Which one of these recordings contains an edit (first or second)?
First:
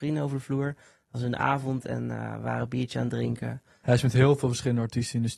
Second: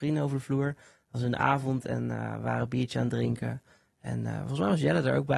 first